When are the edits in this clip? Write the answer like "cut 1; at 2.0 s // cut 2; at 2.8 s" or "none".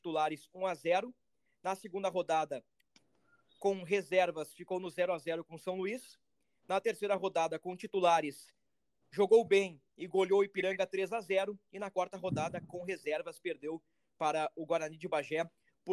none